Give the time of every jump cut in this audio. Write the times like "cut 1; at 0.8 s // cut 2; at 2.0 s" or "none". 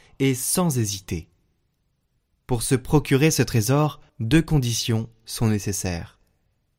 cut 1; at 2.5 s // cut 2; at 4.1 s